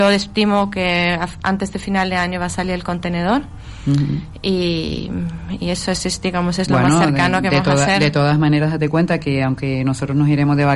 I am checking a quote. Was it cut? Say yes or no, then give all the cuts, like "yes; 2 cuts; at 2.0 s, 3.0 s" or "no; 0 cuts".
no; 0 cuts